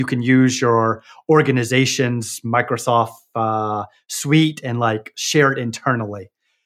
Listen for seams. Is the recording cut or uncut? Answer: uncut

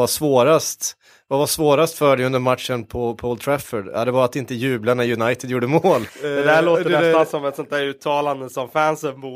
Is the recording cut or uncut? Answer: cut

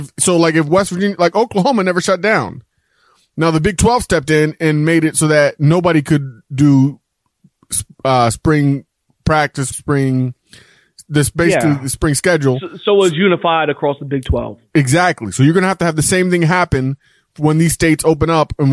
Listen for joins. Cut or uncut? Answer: cut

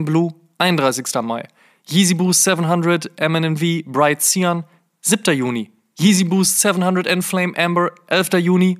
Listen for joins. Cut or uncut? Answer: uncut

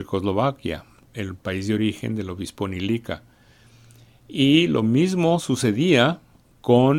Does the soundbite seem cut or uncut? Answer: cut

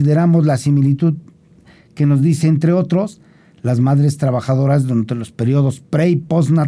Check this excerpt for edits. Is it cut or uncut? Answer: uncut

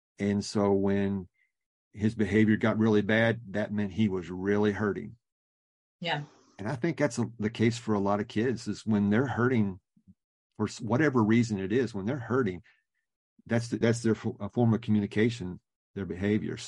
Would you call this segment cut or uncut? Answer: cut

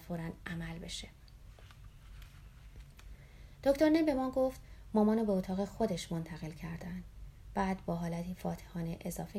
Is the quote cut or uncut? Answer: uncut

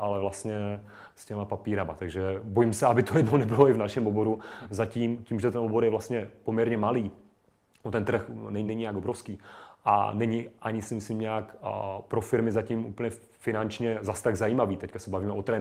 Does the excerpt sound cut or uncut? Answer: cut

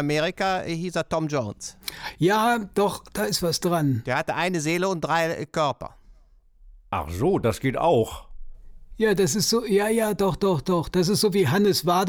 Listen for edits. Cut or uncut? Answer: uncut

